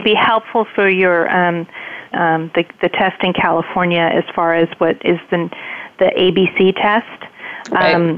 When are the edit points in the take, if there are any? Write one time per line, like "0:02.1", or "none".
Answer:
0:02.1

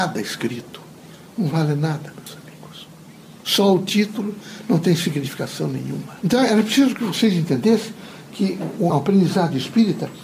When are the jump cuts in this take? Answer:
0:06.2
0:08.9

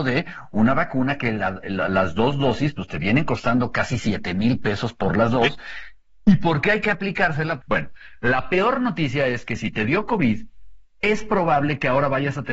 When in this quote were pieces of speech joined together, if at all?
0:01.6
0:07.6

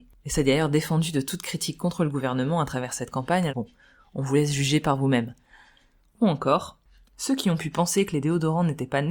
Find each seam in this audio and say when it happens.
0:03.5
0:06.0

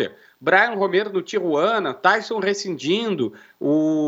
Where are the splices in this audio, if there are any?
none

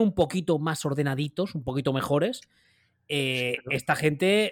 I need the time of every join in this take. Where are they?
none

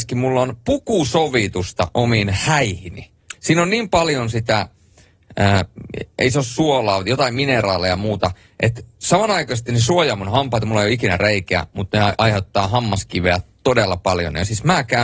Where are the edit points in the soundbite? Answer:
0:03.3

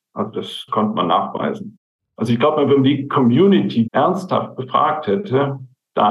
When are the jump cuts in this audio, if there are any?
0:02.0
0:03.8

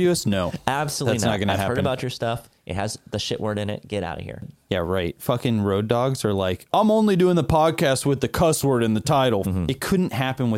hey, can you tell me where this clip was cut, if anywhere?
0:06.7
0:09.4

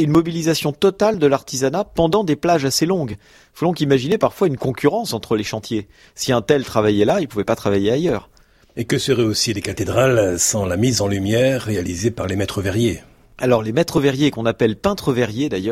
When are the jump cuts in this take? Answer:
0:08.7

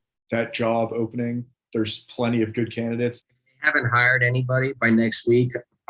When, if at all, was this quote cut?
0:01.7
0:03.2

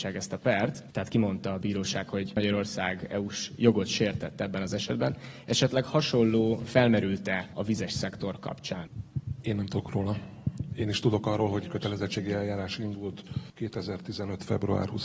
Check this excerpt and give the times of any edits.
none

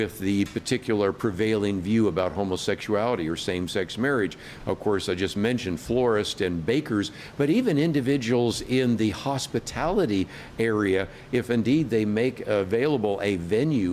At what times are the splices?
0:04.6

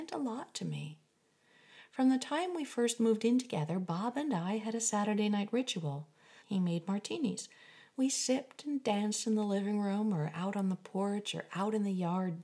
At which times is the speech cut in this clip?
0:06.4

